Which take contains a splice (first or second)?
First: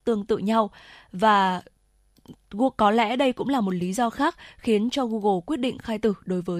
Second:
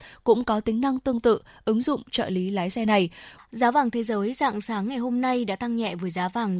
second